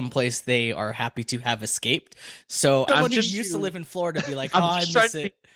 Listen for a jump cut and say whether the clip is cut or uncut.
cut